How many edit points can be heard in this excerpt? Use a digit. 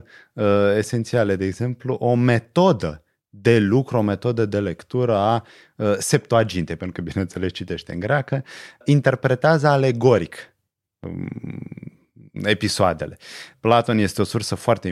2